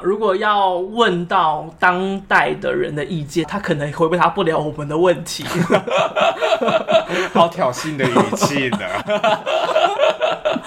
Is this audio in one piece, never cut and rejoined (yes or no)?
no